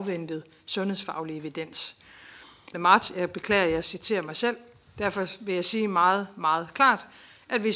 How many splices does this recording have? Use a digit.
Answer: 1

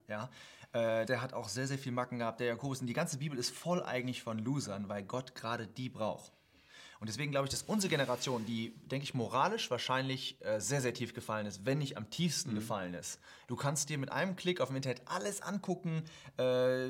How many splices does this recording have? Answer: 2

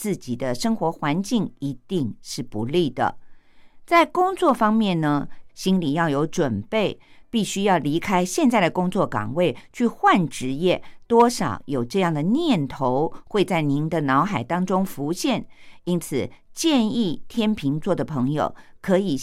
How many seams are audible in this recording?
3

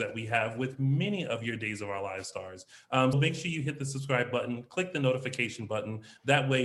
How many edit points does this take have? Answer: 1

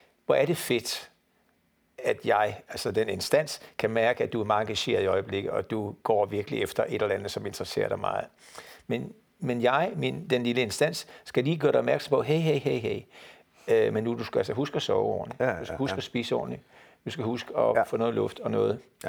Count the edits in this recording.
0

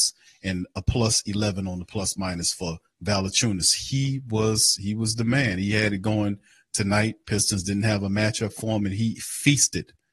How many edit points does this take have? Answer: 0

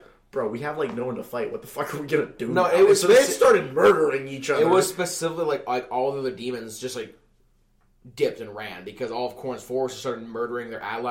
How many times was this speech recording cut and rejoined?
0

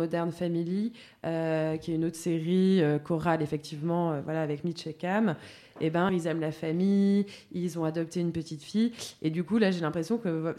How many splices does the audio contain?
1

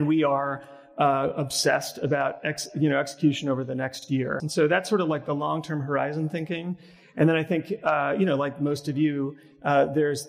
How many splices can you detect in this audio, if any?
1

